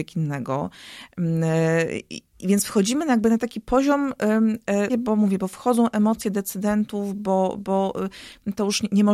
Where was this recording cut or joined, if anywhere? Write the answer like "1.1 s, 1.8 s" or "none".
4.9 s